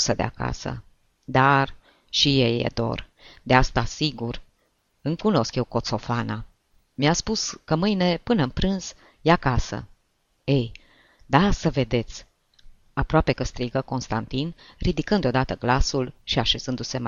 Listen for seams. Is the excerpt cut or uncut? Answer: uncut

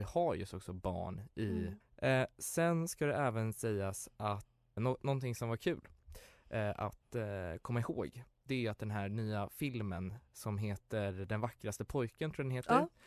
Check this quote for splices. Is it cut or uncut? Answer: cut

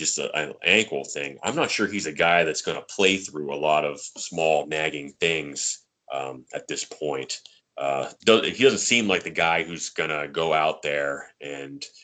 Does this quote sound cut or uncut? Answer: cut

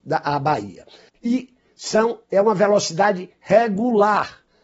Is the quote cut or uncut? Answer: cut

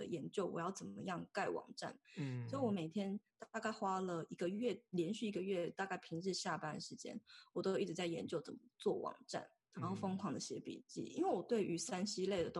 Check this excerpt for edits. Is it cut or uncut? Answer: cut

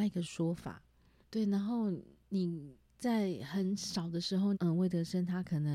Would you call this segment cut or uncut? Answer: cut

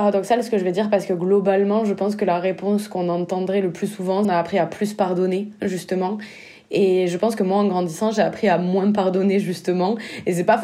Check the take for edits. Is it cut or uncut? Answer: cut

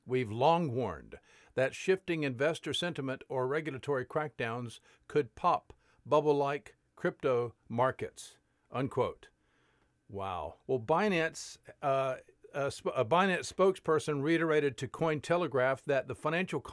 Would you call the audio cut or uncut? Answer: cut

